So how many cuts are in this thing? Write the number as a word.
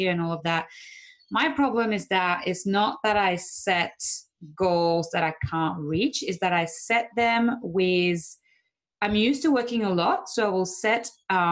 zero